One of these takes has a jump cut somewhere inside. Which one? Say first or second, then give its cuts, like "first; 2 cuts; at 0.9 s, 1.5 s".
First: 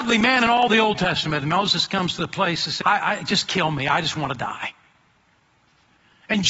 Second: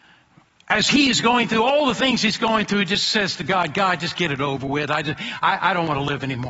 first; 1 cut; at 2.8 s